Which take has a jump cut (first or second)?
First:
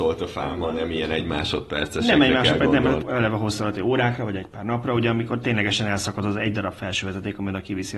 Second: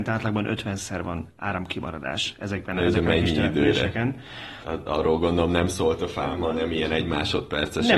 first